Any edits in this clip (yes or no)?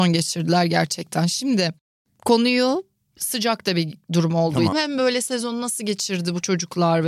yes